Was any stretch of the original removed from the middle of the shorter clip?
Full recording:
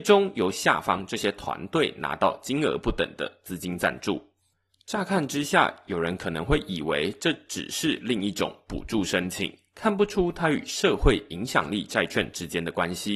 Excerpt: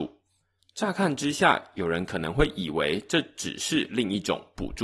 no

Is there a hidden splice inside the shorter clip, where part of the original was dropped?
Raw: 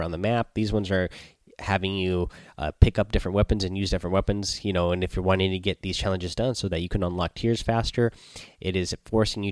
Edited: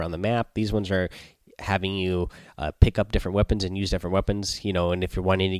no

